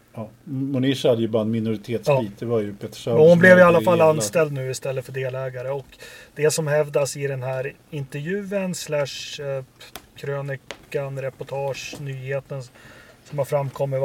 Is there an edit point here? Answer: no; 0 cuts

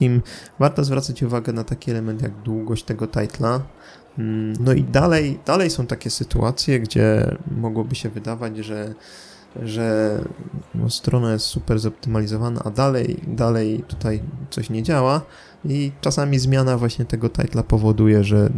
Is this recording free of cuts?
no; 1 cut; at 4.6 s

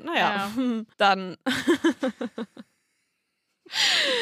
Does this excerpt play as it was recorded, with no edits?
no; 1 cut; at 0.9 s

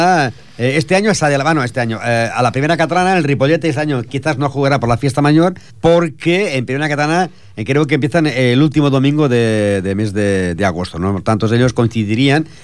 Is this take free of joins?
no; 1 cut; at 5.7 s

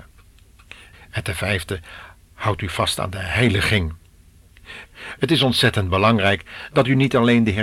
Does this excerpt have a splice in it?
yes; 2 cuts; at 0.9 s, 4.9 s

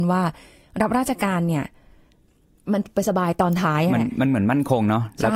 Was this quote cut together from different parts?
no; 0 cuts

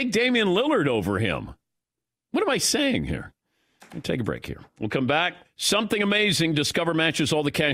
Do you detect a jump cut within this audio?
yes; 1 cut; at 5.4 s

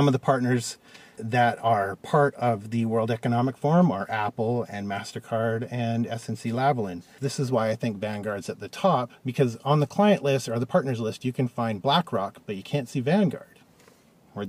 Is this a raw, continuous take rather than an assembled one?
no; 3 cuts; at 1.2 s, 7.2 s, 9.2 s

